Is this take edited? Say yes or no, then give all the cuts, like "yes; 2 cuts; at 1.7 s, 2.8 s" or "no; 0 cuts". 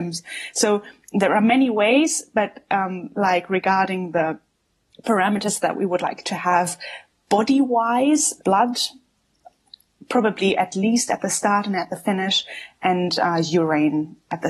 yes; 1 cut; at 8.4 s